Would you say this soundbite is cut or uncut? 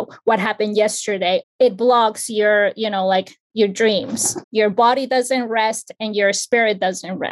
cut